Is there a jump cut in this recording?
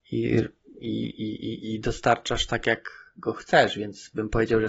no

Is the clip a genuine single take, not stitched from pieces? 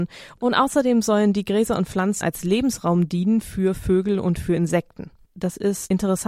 no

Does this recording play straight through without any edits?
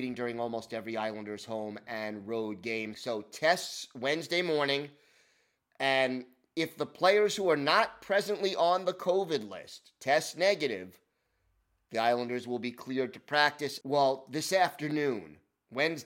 no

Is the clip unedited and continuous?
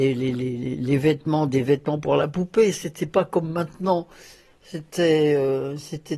yes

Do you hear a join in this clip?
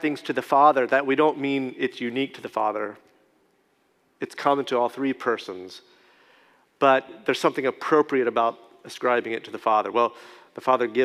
no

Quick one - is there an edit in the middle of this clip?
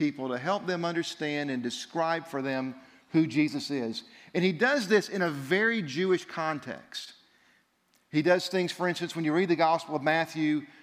no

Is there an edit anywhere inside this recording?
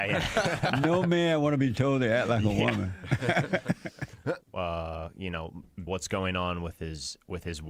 yes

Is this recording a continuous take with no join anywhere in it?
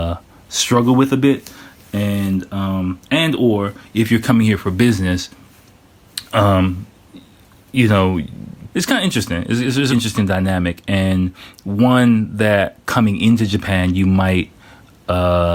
no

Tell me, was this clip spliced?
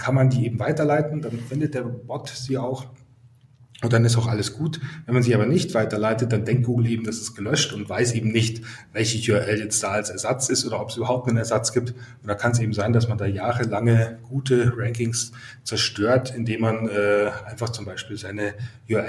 no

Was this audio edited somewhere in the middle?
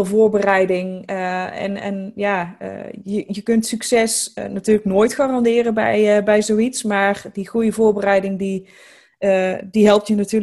no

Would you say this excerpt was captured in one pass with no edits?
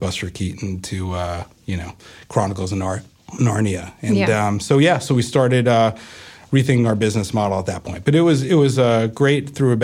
yes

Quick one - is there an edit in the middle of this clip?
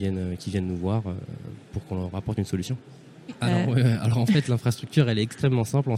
yes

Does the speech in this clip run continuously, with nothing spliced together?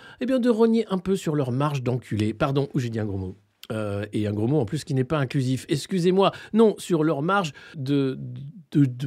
no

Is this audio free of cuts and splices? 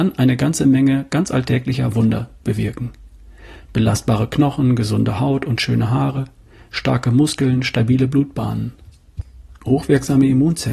yes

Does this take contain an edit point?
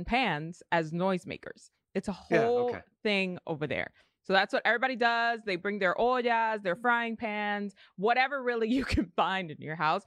no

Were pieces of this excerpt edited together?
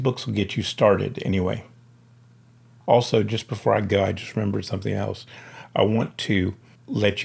no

